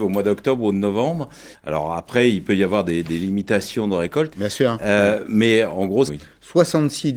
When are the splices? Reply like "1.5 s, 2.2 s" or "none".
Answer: 1.5 s, 4.3 s, 6.1 s